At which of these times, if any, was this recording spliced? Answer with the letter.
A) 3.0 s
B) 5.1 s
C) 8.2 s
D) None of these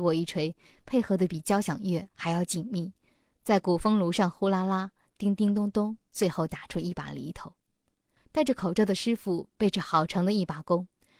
C